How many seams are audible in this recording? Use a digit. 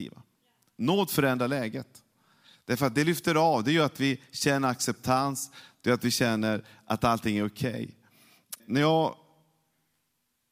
1